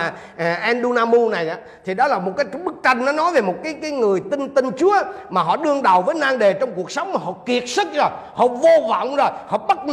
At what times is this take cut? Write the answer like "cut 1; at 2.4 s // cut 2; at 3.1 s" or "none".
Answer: none